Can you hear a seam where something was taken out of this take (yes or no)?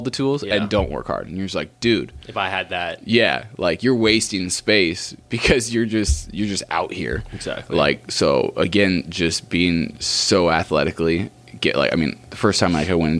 no